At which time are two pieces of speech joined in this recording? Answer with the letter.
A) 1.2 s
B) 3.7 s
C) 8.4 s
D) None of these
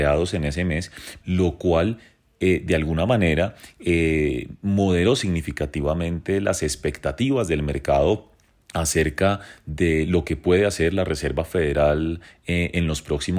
A